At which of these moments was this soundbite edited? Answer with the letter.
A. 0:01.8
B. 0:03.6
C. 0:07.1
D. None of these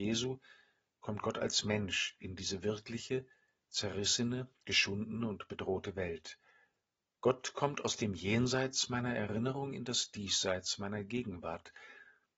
D